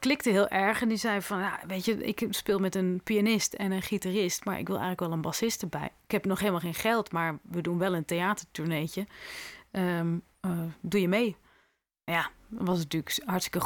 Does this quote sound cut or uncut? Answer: uncut